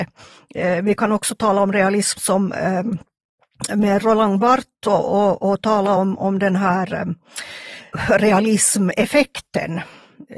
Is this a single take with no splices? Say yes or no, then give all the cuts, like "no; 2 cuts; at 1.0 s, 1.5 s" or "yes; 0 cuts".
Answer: yes; 0 cuts